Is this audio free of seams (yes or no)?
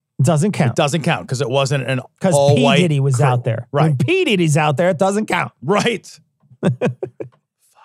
yes